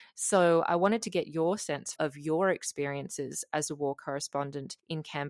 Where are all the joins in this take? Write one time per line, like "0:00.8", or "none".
0:02.0